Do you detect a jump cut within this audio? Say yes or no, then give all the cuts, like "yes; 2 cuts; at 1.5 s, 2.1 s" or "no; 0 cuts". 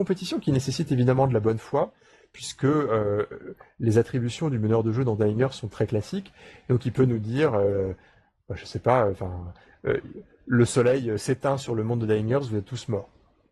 no; 0 cuts